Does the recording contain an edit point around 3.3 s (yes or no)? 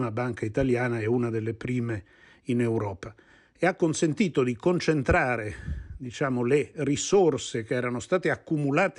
no